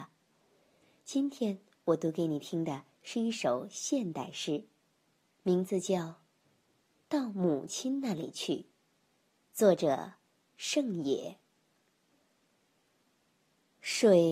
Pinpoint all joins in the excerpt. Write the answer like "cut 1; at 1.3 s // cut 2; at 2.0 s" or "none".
none

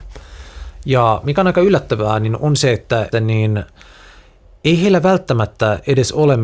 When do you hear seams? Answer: cut 1; at 3.1 s

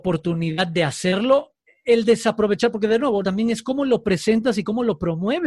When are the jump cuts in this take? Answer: cut 1; at 3.2 s

